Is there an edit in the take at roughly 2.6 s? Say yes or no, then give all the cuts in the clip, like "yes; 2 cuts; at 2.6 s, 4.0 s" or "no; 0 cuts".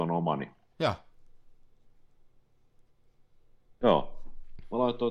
no; 1 cut; at 3.8 s